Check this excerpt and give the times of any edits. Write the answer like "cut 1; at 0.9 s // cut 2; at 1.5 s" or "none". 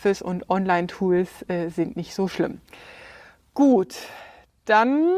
none